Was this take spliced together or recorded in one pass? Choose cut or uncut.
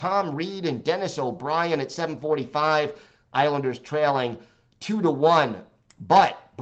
uncut